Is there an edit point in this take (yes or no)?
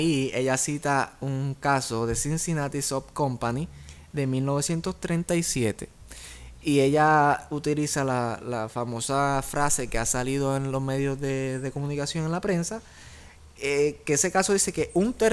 no